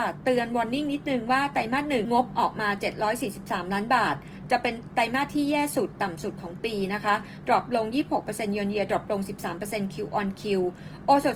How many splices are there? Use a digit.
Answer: 1